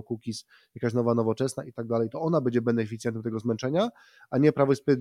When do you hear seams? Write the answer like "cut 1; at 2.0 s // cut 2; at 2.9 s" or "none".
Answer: cut 1; at 2.1 s